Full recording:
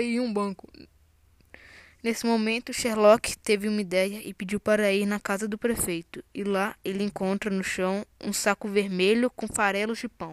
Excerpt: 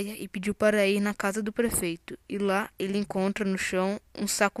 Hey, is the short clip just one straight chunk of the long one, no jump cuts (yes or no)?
yes